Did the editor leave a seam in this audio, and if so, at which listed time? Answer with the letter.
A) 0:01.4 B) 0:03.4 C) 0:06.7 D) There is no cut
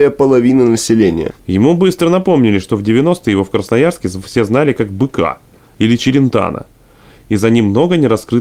A